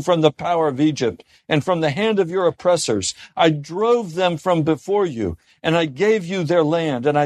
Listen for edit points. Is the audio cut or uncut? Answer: uncut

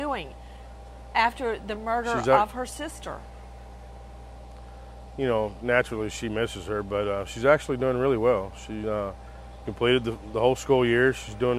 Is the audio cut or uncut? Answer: uncut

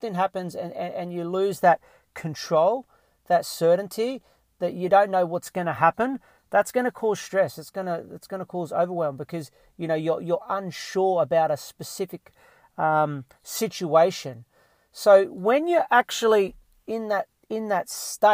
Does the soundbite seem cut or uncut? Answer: uncut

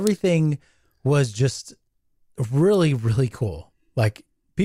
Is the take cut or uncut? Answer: uncut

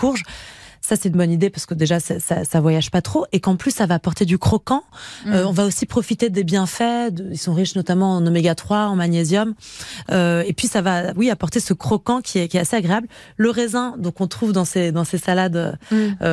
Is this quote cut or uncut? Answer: uncut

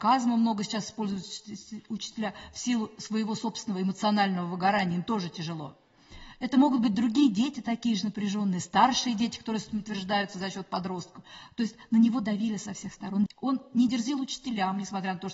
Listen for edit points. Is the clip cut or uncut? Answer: cut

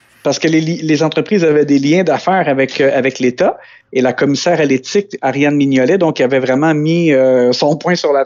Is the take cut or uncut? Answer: uncut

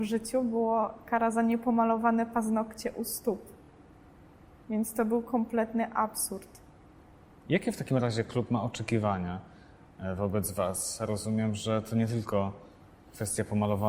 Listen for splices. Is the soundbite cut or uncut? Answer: uncut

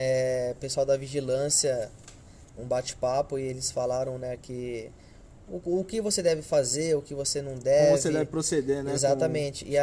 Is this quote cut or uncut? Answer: cut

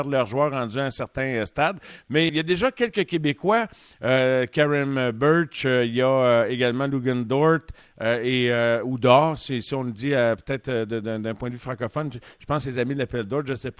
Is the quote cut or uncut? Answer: cut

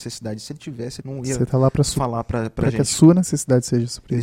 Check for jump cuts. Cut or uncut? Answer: cut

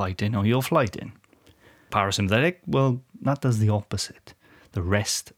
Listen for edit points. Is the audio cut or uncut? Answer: uncut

